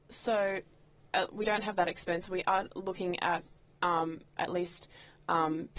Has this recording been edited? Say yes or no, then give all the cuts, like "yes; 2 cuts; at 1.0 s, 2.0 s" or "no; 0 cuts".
yes; 1 cut; at 4.4 s